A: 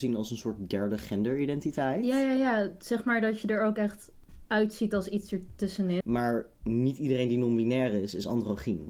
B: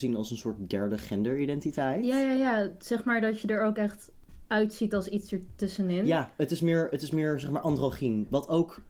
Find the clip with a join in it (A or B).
A